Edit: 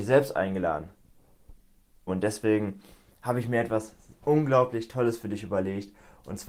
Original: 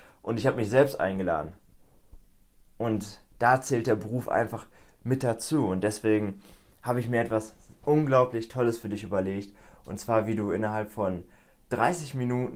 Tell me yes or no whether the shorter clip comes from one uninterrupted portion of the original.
no